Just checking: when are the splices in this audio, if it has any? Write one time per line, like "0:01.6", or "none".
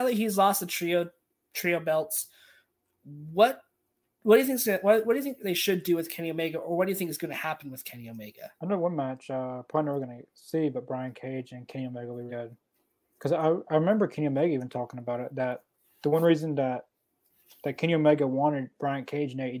0:08.6
0:12.3